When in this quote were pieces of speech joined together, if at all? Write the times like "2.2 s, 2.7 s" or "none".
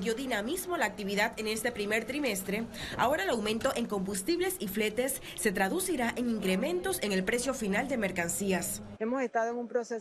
9.0 s

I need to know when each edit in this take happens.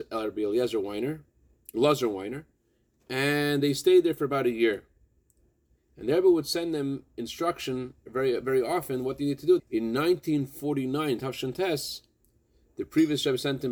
9.6 s

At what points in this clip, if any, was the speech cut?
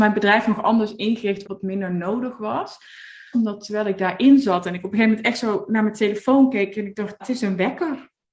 1.4 s, 3.3 s, 7.2 s

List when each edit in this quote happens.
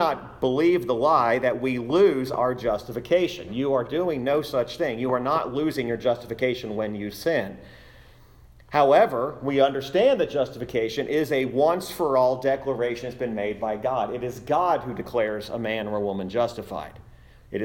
none

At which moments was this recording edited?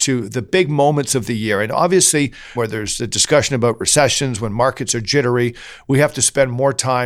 2.5 s

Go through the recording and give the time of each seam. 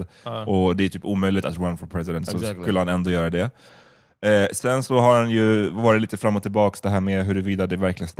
none

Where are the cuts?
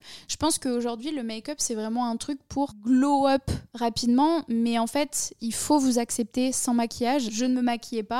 7.3 s

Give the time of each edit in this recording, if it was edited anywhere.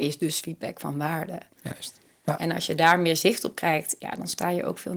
none

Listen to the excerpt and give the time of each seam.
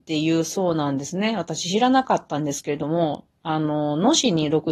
none

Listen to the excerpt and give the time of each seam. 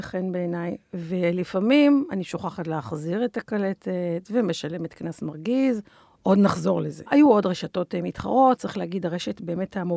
7.1 s, 8.6 s

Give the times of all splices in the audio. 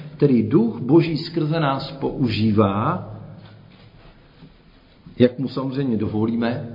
none

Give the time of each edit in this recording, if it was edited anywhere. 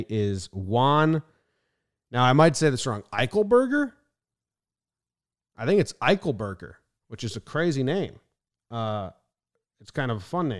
none

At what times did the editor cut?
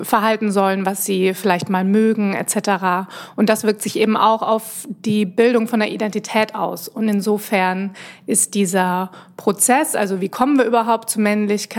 none

